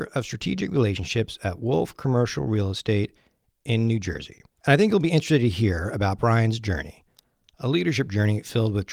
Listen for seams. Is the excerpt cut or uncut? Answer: uncut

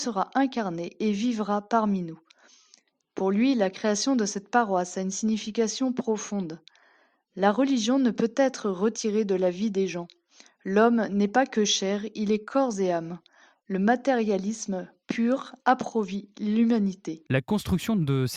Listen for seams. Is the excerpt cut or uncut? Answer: uncut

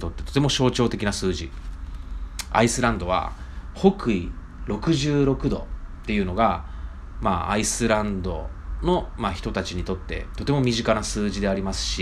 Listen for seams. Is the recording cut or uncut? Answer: uncut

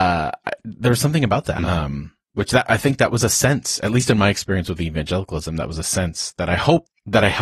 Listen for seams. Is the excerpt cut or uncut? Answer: cut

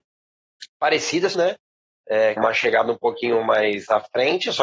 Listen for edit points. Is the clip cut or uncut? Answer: cut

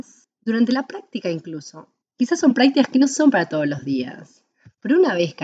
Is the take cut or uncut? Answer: cut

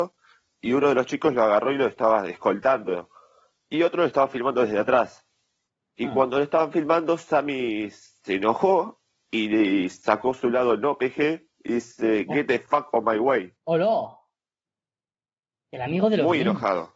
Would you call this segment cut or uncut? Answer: cut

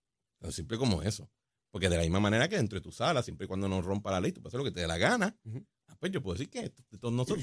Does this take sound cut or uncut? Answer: uncut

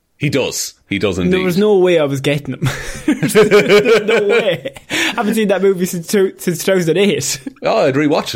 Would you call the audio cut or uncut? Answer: uncut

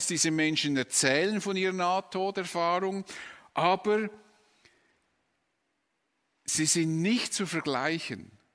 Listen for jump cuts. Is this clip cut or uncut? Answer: uncut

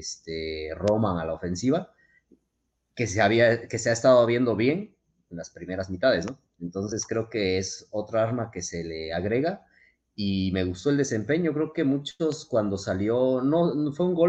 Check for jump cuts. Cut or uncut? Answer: uncut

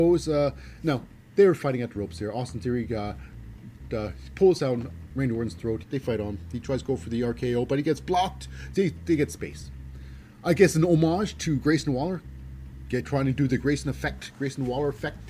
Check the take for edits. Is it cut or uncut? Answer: cut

